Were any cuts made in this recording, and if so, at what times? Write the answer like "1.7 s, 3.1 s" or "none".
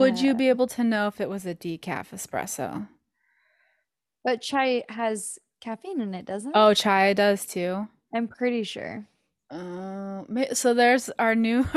none